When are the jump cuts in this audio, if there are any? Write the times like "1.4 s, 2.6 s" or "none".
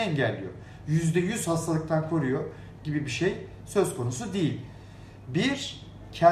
none